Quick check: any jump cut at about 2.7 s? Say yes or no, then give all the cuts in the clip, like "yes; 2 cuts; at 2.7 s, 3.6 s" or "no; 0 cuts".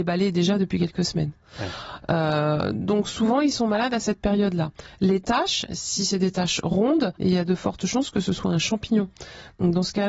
no; 1 cut; at 7.2 s